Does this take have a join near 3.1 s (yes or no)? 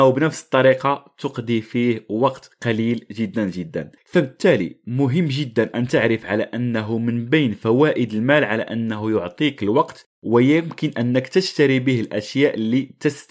no